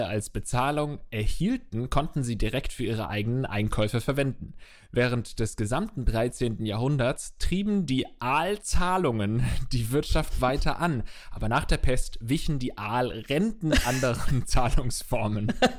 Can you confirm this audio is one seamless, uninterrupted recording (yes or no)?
yes